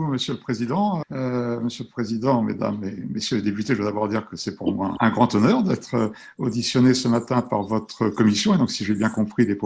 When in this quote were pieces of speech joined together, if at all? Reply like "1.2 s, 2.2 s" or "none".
1.0 s, 5.0 s